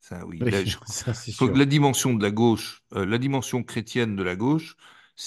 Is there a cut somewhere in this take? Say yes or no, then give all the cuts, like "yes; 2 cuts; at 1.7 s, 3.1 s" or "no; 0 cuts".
no; 0 cuts